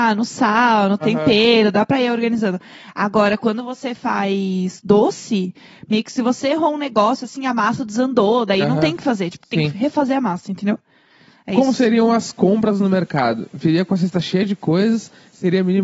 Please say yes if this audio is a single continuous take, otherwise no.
yes